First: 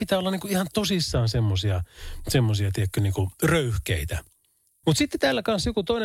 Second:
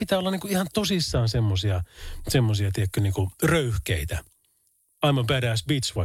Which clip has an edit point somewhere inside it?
first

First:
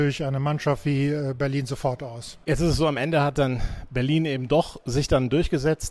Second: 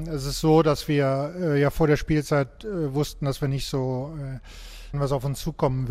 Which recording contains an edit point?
second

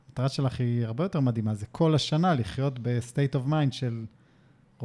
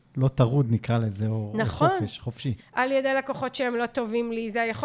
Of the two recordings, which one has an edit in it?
second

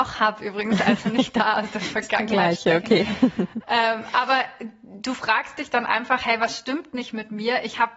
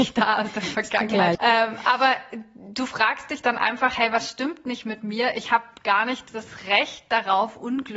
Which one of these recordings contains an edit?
second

